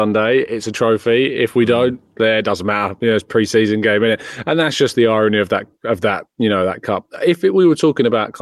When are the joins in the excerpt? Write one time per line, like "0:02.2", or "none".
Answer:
none